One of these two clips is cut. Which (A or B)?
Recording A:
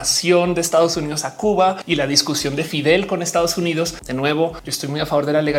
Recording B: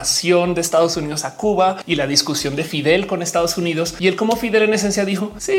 A